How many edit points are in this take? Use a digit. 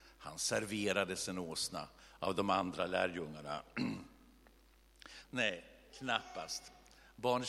1